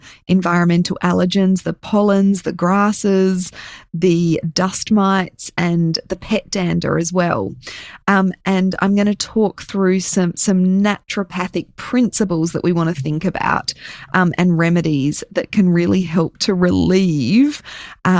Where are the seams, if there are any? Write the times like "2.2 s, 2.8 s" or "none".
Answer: none

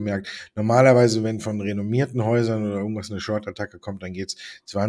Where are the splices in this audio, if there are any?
none

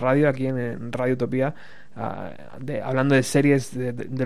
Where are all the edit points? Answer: none

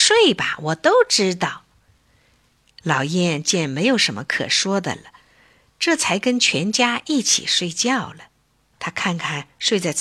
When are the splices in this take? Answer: 8.7 s

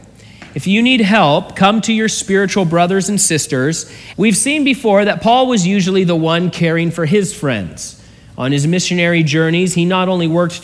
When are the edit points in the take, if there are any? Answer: 4.1 s

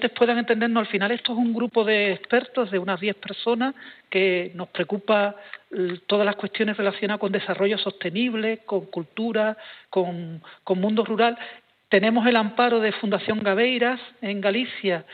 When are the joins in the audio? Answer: none

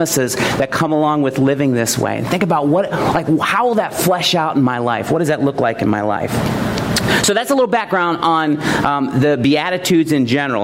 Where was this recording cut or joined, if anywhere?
none

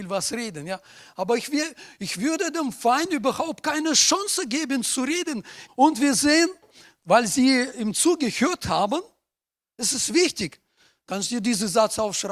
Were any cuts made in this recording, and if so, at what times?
5.7 s

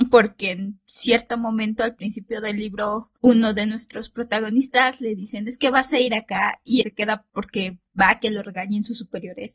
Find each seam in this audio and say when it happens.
6.8 s

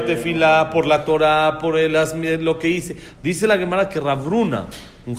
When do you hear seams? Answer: 3.1 s

